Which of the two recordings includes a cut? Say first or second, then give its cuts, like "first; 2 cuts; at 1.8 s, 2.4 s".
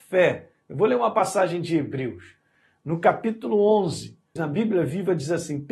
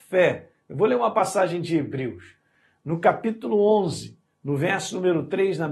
first; 1 cut; at 4.4 s